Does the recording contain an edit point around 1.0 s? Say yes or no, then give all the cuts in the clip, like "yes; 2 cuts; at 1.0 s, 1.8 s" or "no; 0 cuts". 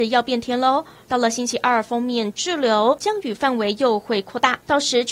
yes; 2 cuts; at 1.0 s, 3.0 s